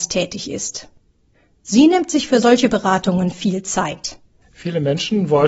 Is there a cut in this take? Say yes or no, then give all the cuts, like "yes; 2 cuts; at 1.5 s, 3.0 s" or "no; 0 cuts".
yes; 1 cut; at 4.4 s